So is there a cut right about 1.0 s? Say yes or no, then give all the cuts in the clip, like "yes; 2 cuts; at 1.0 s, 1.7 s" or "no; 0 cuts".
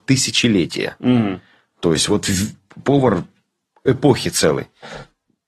no; 0 cuts